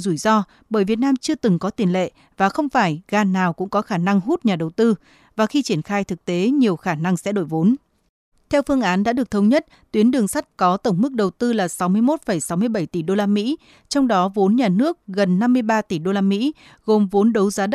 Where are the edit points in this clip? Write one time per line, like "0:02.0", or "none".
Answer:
0:08.3